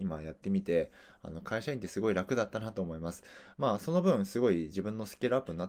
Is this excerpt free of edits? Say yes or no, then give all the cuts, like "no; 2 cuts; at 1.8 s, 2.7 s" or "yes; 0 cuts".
no; 1 cut; at 3.5 s